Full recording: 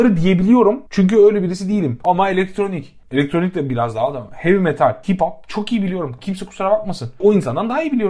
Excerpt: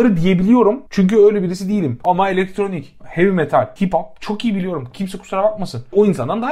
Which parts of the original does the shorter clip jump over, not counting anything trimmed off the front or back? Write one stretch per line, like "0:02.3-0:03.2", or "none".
0:03.0-0:04.3